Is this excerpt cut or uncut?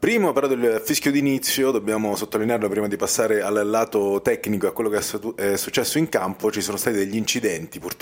uncut